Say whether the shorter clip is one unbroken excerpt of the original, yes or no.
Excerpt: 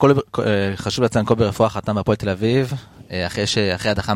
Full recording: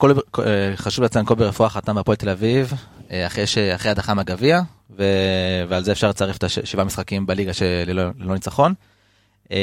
yes